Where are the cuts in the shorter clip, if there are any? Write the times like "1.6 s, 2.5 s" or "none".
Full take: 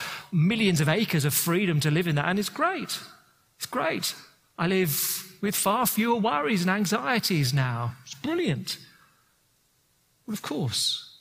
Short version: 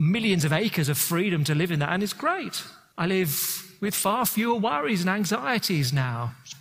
2.9 s